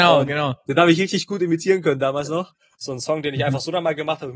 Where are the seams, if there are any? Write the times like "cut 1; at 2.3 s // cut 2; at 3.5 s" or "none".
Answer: cut 1; at 2.7 s